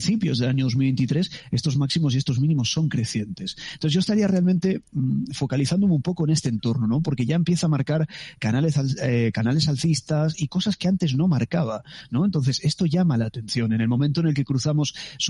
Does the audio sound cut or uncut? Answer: uncut